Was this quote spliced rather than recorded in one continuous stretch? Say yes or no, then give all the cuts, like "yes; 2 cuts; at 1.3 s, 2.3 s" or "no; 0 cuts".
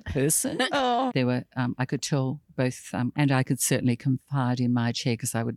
yes; 2 cuts; at 1.1 s, 3.1 s